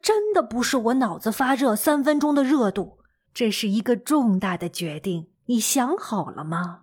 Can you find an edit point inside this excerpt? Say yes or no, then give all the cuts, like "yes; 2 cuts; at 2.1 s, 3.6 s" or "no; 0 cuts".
yes; 2 cuts; at 3.3 s, 5.3 s